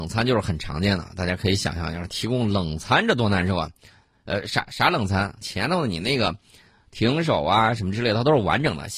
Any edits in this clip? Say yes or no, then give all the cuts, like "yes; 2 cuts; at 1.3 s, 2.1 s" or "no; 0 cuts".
yes; 1 cut; at 5.4 s